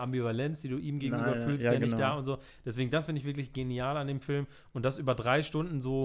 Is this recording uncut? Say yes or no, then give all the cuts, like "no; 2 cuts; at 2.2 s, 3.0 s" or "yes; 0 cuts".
yes; 0 cuts